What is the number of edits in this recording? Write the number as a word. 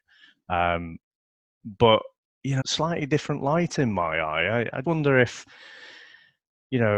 two